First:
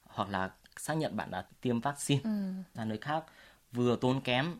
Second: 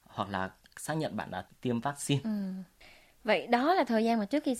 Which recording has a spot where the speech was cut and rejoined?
first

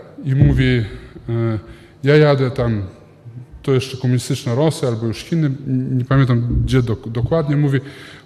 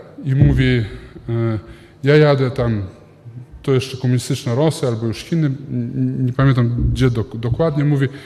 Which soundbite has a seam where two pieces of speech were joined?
first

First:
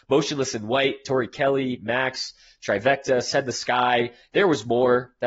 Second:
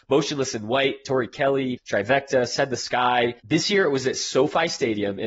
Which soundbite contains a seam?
second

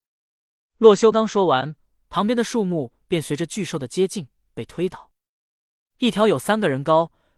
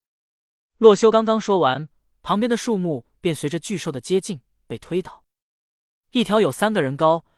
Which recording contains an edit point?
first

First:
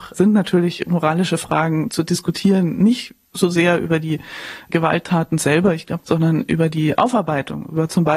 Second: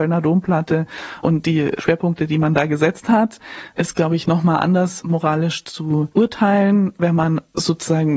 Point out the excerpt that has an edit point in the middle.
first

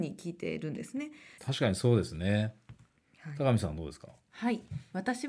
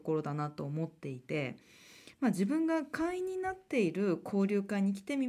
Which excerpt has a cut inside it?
first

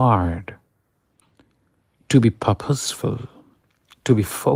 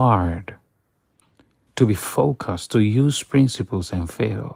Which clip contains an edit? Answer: second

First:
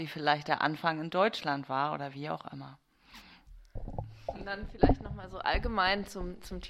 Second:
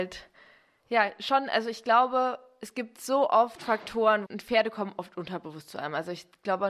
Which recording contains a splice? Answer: second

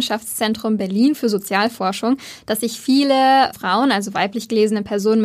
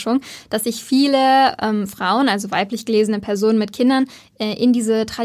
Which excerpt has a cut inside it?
first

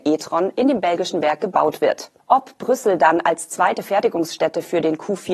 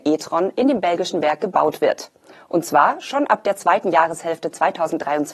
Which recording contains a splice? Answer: first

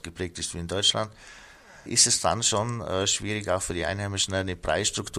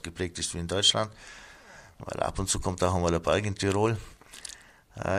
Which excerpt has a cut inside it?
first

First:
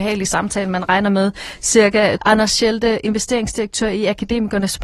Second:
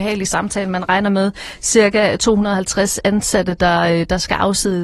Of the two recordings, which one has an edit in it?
first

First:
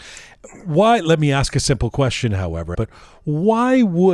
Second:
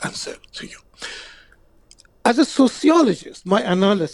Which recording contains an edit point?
first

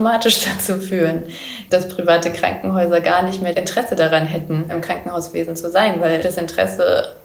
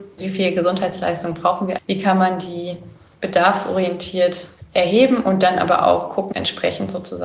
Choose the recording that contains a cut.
second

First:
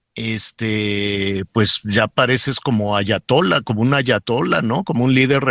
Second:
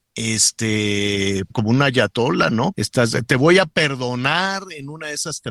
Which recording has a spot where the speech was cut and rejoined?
second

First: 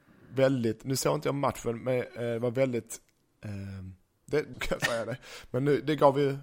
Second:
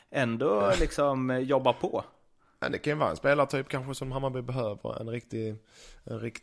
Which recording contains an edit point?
first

